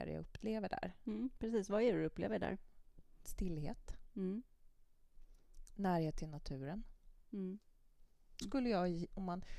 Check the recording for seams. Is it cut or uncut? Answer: cut